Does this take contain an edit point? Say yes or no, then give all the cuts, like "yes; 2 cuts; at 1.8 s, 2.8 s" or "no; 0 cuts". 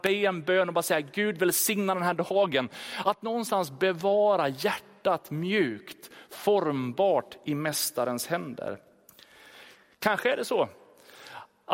no; 0 cuts